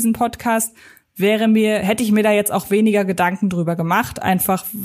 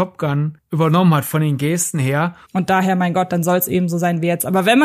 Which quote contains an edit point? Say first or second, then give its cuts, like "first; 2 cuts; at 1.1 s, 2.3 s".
second; 1 cut; at 2.4 s